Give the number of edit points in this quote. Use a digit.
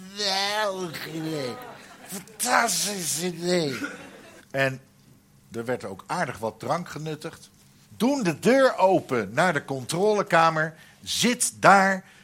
2